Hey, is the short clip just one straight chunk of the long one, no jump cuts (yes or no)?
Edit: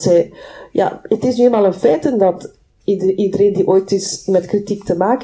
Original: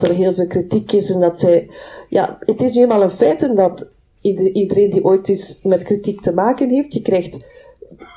yes